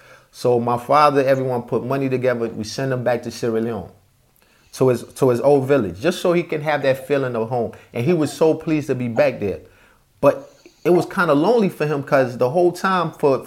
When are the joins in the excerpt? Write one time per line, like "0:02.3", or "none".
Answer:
none